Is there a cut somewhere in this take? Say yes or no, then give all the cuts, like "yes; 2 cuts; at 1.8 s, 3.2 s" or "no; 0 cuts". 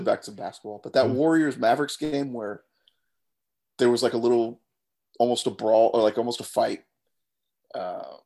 no; 0 cuts